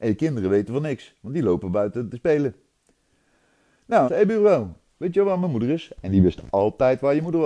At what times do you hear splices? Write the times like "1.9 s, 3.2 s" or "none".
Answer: 4.1 s

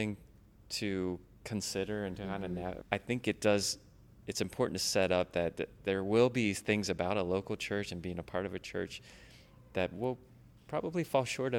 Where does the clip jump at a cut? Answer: 2.8 s

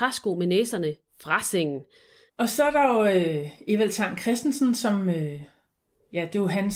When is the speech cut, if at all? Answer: 2.3 s

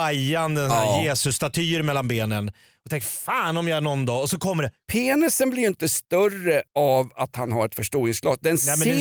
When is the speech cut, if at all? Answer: 4.8 s, 6.7 s

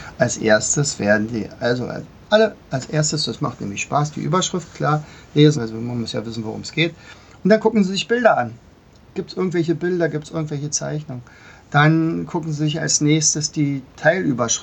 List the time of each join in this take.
5.5 s

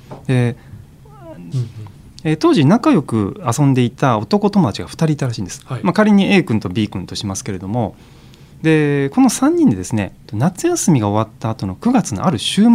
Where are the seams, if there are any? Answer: 1.5 s, 10.2 s

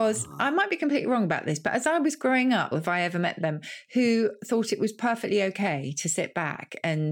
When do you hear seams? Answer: 2.7 s

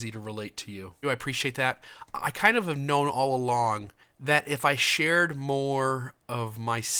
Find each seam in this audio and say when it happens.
1.0 s

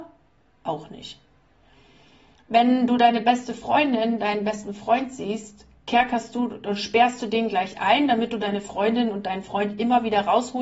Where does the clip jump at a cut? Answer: none

